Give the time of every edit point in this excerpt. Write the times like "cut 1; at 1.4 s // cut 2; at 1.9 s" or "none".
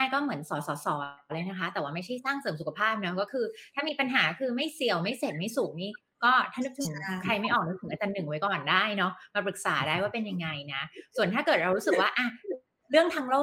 none